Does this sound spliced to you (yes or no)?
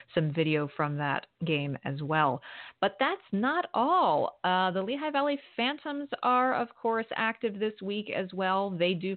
no